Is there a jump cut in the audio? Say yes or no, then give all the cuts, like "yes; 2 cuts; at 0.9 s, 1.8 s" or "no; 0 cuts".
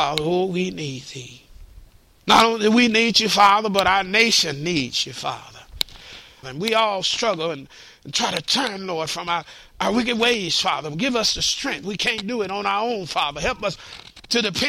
yes; 2 cuts; at 2.2 s, 6.4 s